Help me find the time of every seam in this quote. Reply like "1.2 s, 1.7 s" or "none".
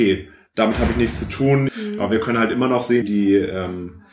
1.7 s, 3.0 s